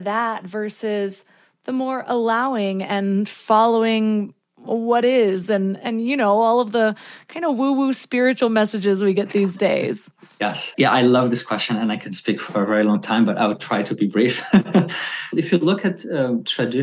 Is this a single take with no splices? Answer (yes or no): yes